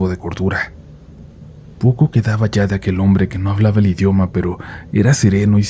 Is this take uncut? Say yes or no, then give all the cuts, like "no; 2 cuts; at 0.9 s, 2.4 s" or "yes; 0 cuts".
yes; 0 cuts